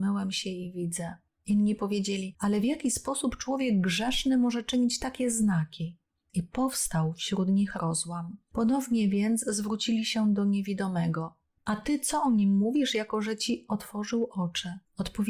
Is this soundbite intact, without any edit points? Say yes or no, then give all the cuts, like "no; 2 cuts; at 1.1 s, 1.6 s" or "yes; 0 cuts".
no; 1 cut; at 1.3 s